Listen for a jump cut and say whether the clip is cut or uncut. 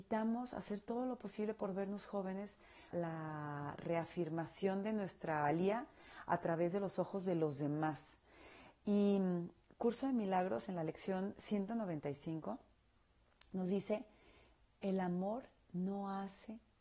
cut